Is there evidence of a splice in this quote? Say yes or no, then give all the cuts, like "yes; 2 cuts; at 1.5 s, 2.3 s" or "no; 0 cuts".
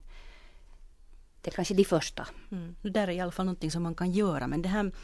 no; 0 cuts